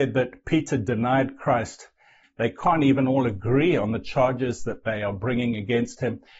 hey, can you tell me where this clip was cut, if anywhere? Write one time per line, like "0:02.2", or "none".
0:02.2